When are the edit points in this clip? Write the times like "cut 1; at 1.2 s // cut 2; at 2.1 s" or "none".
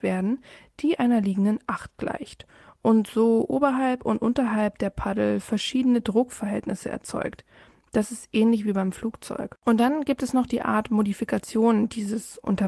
none